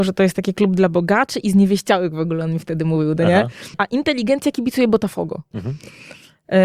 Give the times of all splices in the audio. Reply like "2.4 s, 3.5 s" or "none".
3.7 s, 5.5 s